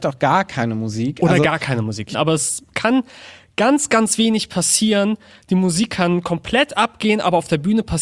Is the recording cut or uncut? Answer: cut